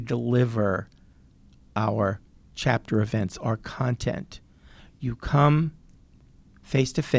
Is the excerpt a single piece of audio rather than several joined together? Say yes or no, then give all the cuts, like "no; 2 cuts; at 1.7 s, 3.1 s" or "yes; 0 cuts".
no; 1 cut; at 4.8 s